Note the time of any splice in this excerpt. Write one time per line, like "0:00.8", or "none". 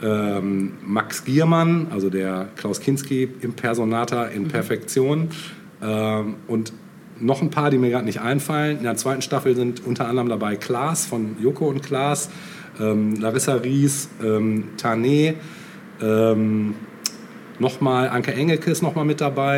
none